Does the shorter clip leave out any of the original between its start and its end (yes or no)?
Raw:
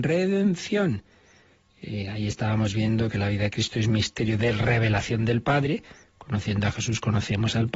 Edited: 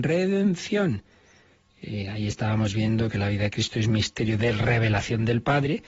no